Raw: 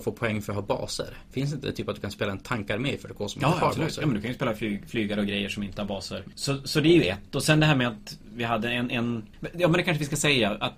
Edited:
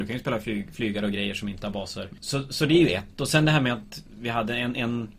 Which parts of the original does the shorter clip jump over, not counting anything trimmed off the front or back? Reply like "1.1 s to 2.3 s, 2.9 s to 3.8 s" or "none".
none